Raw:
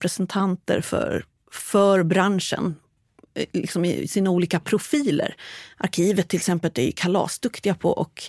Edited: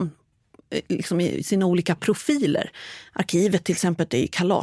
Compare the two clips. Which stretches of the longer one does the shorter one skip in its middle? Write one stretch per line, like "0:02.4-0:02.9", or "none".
none

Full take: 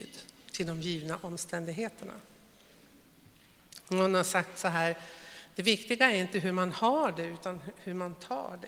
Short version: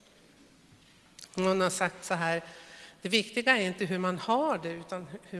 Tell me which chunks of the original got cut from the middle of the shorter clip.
none

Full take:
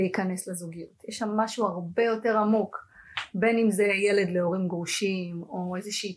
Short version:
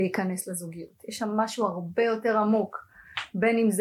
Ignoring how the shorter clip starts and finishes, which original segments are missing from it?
none

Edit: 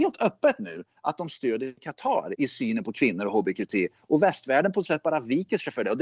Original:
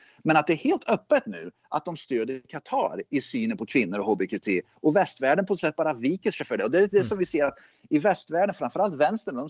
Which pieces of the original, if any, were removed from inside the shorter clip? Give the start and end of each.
0:03.0-0:03.1

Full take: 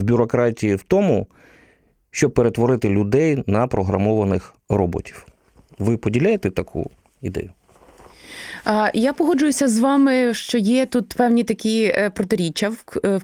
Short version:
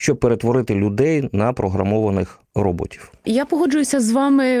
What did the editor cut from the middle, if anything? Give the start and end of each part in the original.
0:05.4-0:08.9

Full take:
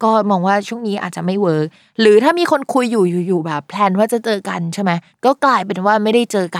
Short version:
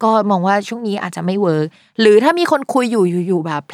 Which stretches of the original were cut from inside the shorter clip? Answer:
none

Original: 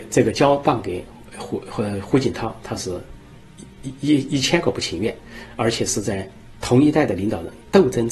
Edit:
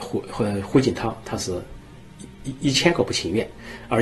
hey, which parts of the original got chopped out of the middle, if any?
0:04.0-0:04.3

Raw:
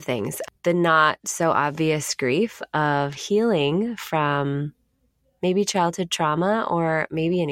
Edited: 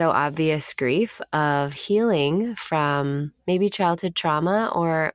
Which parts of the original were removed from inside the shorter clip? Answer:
0:04.8-0:05.3

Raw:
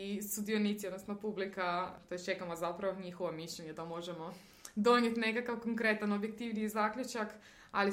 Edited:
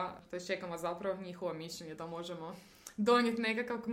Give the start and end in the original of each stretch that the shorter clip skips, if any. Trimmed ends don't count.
none

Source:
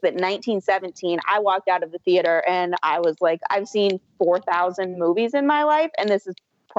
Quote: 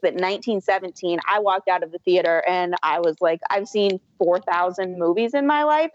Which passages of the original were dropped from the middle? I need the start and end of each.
none

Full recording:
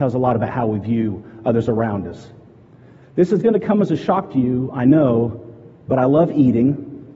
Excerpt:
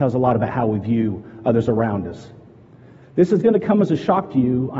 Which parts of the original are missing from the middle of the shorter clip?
none

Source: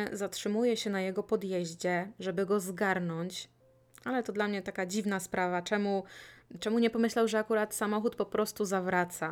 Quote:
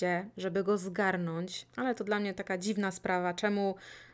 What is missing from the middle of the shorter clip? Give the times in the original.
0:03.5-0:04.0

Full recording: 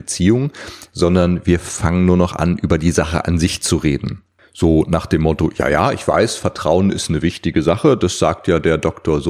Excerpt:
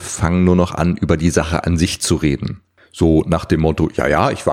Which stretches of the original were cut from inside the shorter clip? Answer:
none

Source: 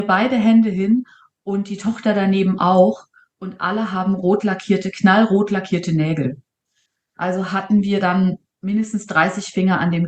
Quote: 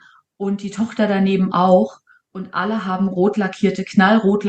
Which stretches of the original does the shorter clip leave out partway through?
none

